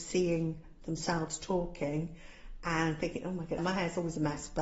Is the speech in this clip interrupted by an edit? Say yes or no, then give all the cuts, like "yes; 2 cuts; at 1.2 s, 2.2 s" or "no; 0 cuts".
yes; 1 cut; at 3.6 s